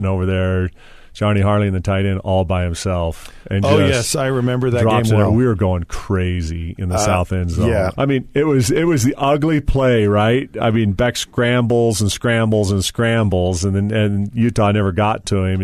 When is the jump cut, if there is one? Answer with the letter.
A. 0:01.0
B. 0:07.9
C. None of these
B